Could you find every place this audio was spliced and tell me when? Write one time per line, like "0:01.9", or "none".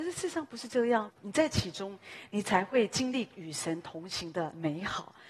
0:01.1